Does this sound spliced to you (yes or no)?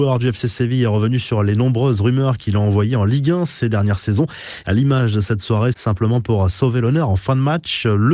yes